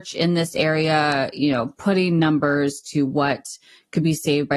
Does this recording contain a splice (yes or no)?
no